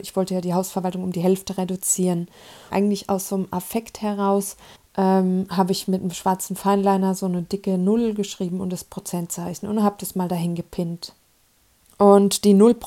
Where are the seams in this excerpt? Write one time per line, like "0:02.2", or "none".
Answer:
0:02.7
0:04.8